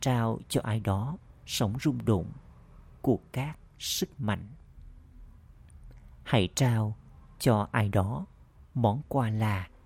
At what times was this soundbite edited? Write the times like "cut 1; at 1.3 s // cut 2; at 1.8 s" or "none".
none

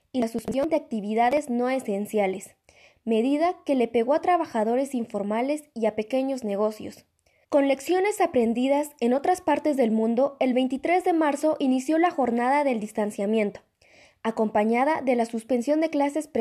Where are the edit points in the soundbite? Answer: cut 1; at 7.4 s

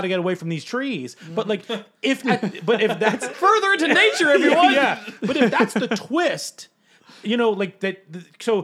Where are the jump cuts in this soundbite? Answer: cut 1; at 3.3 s

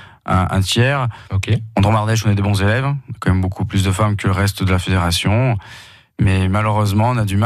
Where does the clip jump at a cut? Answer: none

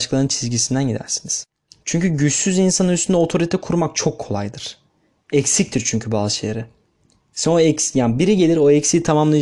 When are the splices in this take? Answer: none

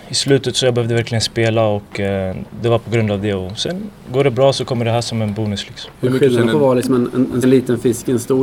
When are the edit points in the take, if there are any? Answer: cut 1; at 5.9 s // cut 2; at 7.4 s

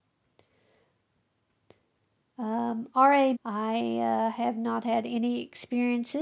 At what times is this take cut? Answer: cut 1; at 3.3 s

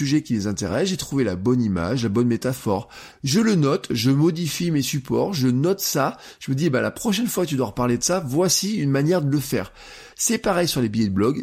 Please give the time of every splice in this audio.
cut 1; at 3.1 s // cut 2; at 10.1 s

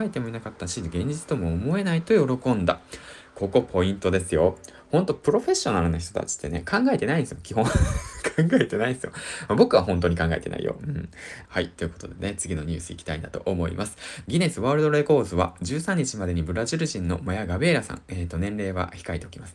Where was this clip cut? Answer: cut 1; at 11.4 s // cut 2; at 14.2 s

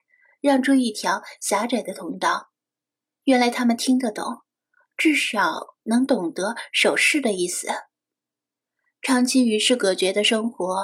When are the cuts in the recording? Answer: none

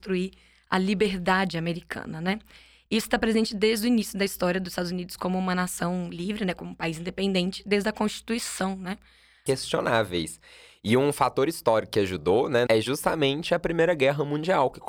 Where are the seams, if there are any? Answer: cut 1; at 9.5 s // cut 2; at 12.7 s

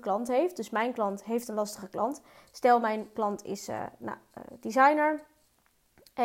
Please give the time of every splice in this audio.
none

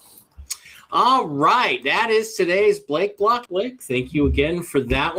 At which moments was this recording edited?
cut 1; at 3.5 s

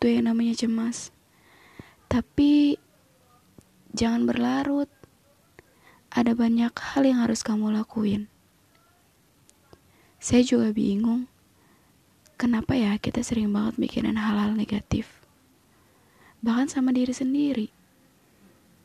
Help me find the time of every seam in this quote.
none

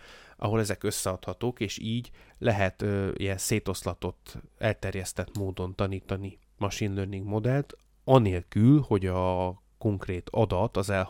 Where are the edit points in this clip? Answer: none

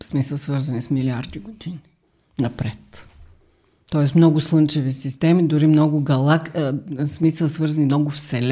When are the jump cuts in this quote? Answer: none

